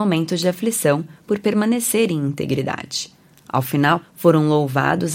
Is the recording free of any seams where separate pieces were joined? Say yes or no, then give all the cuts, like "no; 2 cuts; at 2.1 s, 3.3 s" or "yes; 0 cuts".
no; 1 cut; at 4.0 s